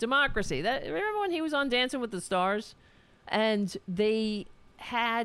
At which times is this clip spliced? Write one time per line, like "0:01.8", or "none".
0:03.2